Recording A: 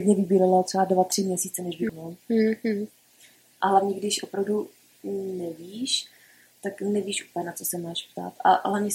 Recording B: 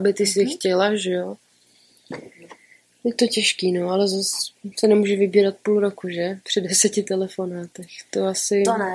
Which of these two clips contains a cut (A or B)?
A